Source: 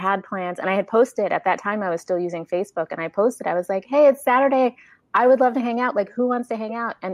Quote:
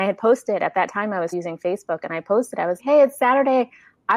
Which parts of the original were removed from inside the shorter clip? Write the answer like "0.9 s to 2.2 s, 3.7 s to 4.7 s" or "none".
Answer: 2.0 s to 2.2 s, 3.7 s to 3.8 s